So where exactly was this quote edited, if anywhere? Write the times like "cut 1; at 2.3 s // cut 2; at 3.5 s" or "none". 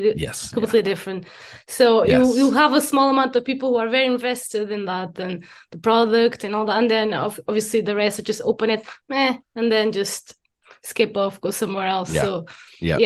none